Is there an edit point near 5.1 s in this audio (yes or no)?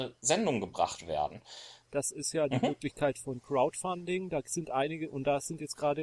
no